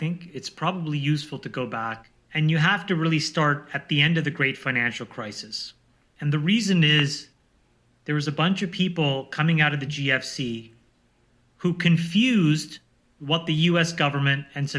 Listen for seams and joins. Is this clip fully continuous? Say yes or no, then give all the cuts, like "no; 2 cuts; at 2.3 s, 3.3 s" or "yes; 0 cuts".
yes; 0 cuts